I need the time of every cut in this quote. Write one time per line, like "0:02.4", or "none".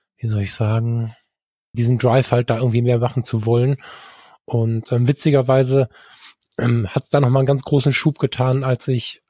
0:01.7